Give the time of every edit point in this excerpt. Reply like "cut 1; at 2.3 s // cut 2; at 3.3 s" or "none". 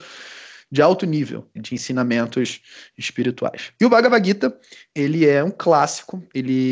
cut 1; at 1.6 s